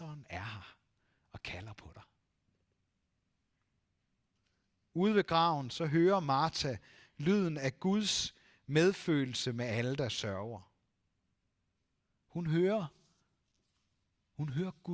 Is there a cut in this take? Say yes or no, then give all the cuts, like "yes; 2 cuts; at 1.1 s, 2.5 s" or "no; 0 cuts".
no; 0 cuts